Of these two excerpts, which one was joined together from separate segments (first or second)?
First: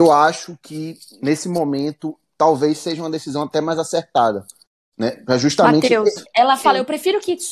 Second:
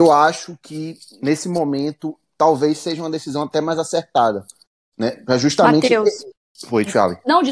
first